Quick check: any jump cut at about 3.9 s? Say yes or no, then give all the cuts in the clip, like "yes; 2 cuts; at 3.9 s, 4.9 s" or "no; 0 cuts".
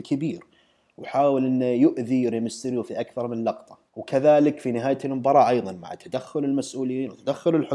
yes; 1 cut; at 3.9 s